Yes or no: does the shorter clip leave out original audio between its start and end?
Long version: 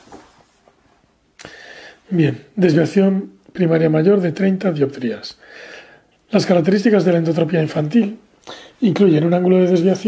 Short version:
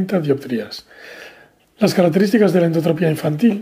no